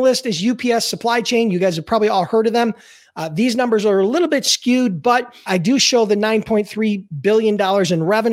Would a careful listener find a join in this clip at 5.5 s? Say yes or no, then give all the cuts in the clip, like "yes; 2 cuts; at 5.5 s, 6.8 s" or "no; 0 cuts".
yes; 1 cut; at 5.5 s